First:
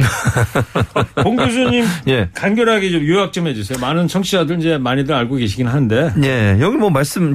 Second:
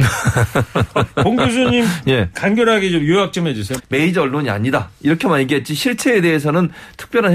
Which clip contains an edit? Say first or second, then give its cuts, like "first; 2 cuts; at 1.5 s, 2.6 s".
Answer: second; 1 cut; at 3.8 s